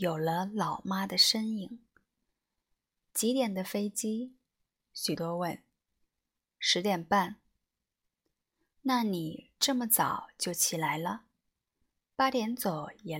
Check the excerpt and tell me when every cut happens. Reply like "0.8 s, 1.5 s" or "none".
5.2 s